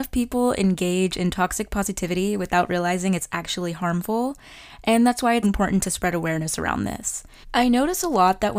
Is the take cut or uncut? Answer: cut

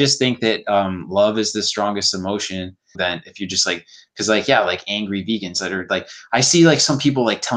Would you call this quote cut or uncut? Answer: cut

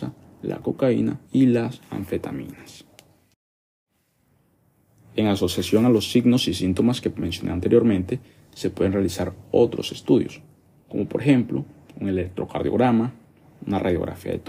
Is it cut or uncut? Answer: cut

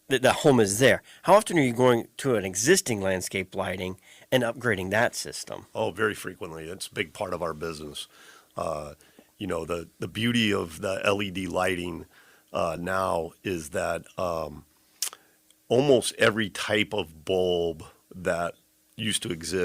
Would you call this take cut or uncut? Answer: uncut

